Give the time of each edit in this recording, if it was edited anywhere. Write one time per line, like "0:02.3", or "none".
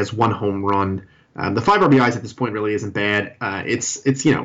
none

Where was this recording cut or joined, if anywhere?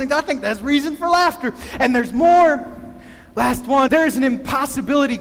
0:03.9

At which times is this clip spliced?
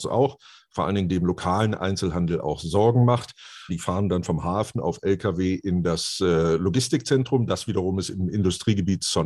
0:03.7

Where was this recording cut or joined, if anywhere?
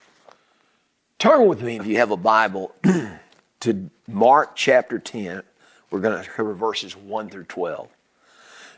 0:01.8

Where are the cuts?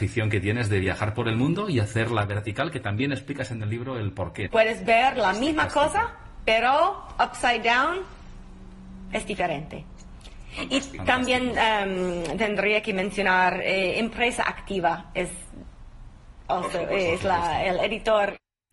0:04.5

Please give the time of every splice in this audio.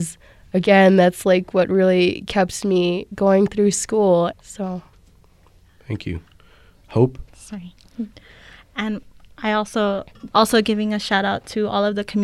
0:04.3
0:10.3

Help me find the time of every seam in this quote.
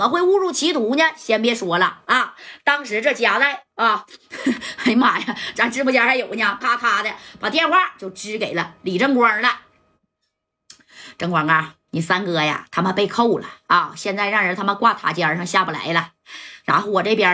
0:06.6
0:11.9

